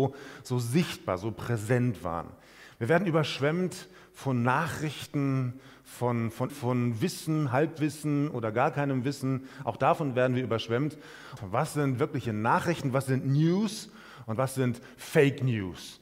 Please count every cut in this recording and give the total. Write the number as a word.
two